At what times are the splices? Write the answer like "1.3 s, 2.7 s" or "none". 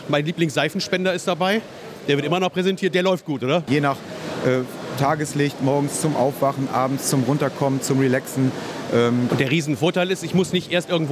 3.7 s, 9.3 s